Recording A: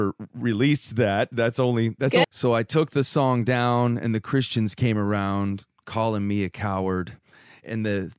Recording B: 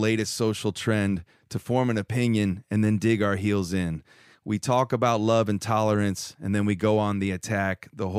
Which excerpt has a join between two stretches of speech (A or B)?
A